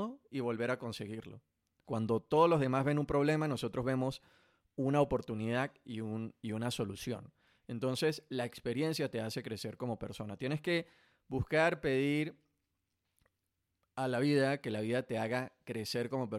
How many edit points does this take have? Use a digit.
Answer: 1